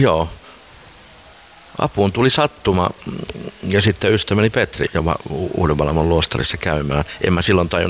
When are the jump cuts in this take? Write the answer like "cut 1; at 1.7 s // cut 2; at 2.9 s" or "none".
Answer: cut 1; at 4.9 s